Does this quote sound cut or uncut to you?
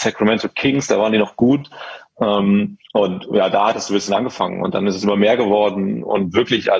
cut